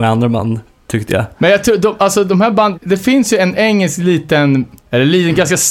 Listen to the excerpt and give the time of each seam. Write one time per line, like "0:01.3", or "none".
0:02.7

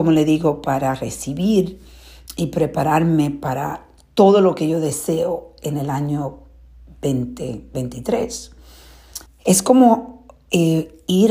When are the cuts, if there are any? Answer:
0:09.3

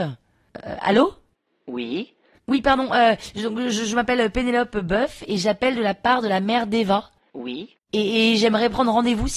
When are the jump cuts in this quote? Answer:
0:07.8

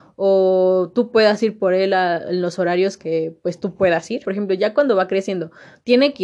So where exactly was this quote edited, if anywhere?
0:04.2

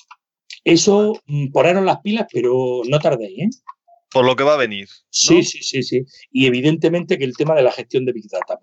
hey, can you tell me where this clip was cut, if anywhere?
none

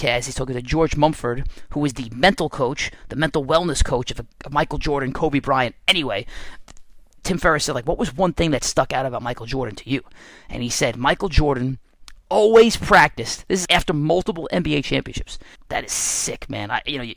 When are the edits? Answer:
0:13.6
0:15.5

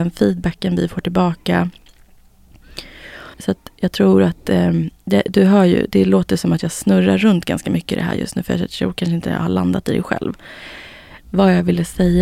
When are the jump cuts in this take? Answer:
0:03.3

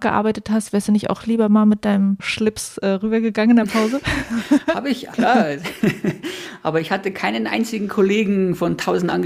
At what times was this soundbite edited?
0:05.1

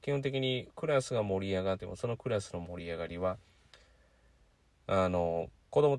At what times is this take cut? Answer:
0:01.8

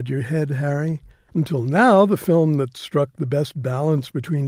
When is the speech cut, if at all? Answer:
0:01.3

